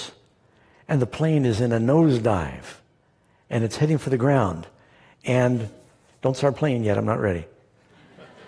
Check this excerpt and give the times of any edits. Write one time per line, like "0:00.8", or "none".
none